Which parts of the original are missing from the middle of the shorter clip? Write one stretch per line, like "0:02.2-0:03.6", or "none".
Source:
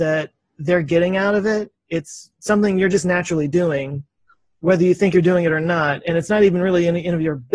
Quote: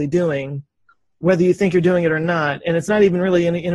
none

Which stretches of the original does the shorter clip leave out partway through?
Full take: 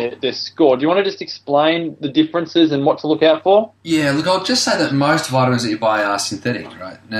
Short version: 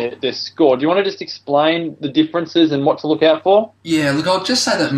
none

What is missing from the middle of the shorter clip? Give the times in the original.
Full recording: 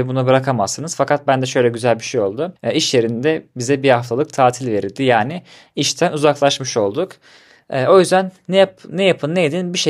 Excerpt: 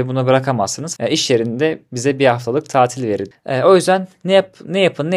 0:01.0-0:02.6
0:04.9-0:07.5

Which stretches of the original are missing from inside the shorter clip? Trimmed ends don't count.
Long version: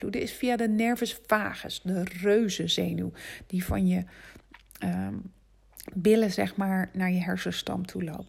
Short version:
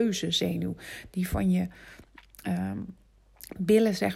none

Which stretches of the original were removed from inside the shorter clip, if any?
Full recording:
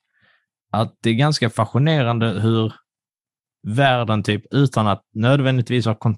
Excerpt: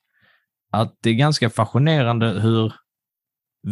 none

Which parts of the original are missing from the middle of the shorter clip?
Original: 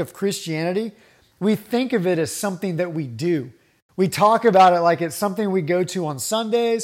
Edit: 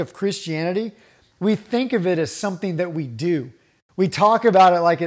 none

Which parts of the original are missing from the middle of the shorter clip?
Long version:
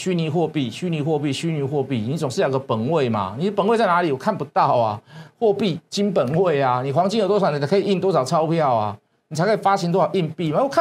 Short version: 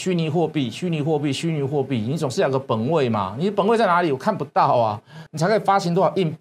0:05.3-0:09.2

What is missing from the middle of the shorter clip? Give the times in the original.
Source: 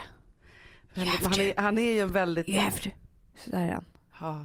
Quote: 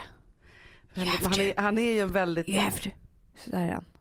none

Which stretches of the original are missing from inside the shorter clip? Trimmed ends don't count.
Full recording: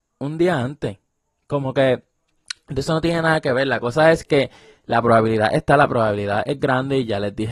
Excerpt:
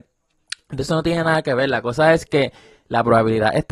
none

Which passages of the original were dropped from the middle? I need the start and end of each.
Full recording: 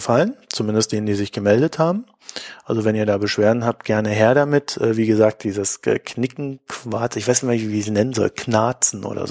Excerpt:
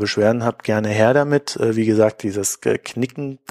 none

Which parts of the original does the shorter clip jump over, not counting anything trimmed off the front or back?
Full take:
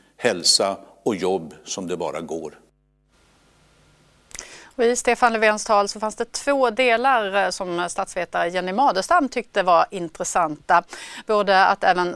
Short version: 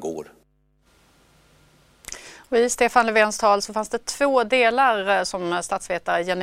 none

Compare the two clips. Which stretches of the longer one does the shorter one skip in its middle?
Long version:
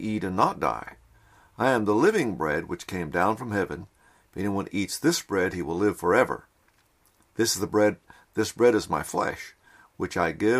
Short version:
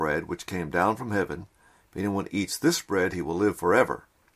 none

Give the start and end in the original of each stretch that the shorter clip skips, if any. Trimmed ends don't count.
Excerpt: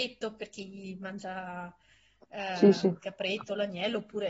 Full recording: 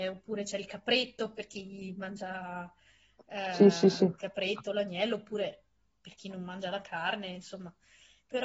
0:03.7-0:03.9

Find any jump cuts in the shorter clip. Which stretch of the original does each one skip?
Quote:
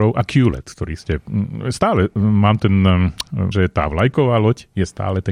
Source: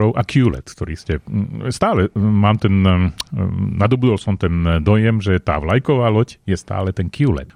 0:03.5-0:05.2

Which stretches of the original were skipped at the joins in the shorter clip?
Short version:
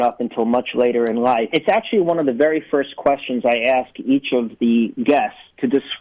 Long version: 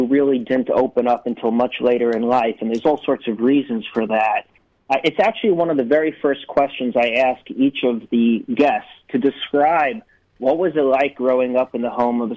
0:02.6-0:05.0

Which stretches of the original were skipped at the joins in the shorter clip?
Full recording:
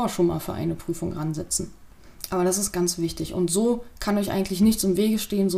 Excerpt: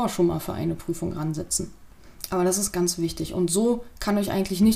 none

